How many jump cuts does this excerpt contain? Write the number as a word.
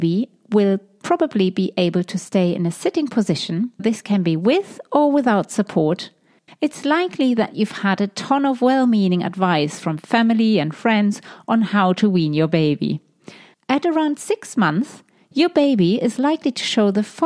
three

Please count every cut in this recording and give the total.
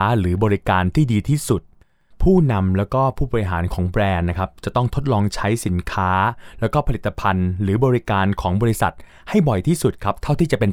zero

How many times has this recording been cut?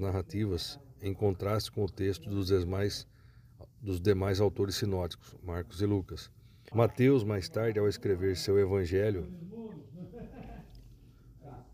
one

